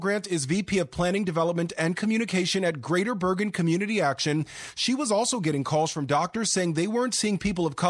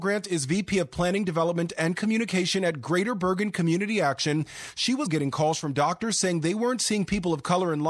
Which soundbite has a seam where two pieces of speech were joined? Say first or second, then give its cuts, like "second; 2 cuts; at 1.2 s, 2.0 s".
second; 1 cut; at 5.1 s